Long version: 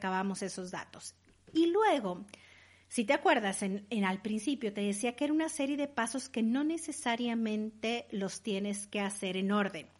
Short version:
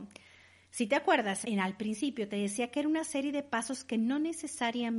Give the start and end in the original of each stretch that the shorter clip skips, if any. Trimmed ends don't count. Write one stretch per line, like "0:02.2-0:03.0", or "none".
0:03.6-0:03.9